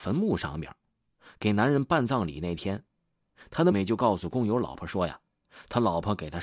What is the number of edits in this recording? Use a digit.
1